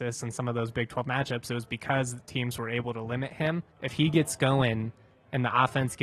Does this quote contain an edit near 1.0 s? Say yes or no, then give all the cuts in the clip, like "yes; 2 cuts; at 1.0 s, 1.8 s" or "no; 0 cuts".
no; 1 cut; at 3.7 s